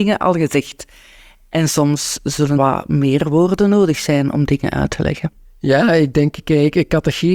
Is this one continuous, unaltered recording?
no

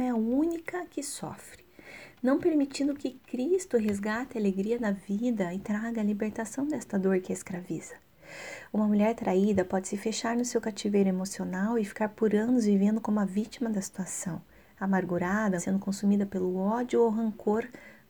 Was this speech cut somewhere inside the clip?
yes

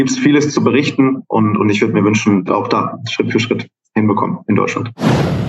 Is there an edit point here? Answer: yes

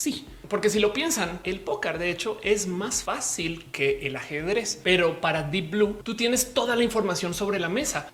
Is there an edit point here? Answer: yes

